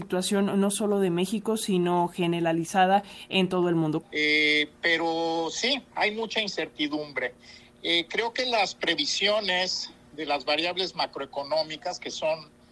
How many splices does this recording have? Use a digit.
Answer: 1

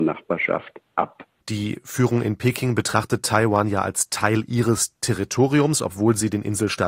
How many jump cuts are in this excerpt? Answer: 1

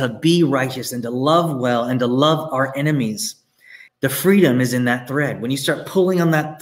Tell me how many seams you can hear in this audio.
1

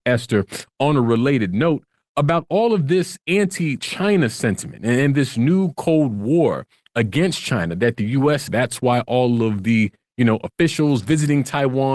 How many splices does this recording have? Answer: 1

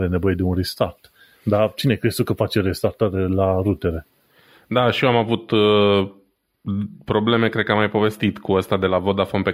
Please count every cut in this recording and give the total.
0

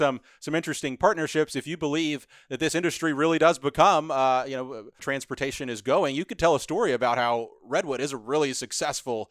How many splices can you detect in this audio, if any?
1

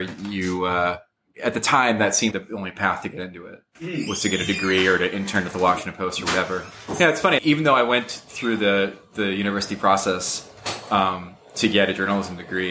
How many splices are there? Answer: 2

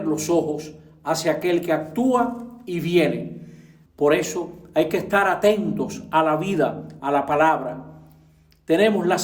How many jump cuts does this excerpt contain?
2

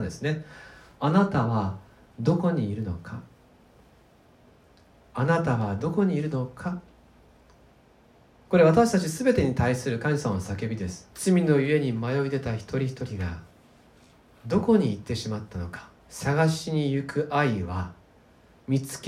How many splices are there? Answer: 2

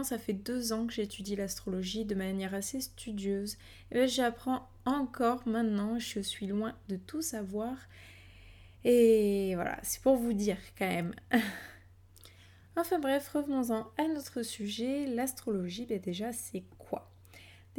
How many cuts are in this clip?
0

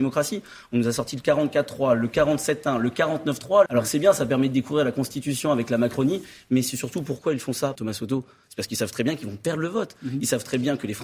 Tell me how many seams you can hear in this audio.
2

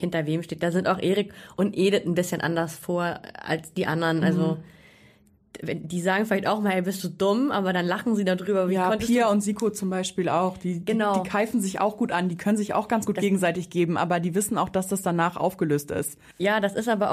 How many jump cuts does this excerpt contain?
0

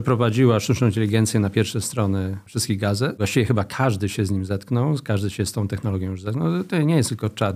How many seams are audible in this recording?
0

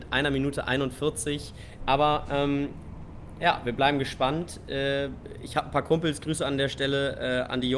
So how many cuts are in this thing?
1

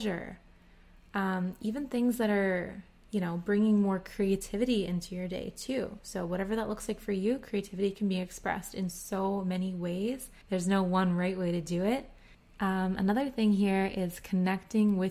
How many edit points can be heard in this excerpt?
1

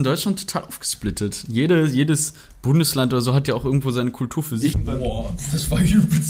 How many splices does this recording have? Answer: 1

